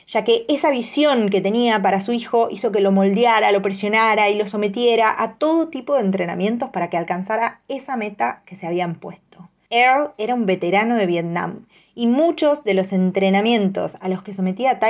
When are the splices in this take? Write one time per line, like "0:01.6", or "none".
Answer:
none